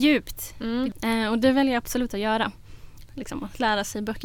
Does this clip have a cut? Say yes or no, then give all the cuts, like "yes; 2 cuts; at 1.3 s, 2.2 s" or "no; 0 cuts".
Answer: yes; 2 cuts; at 0.9 s, 3.1 s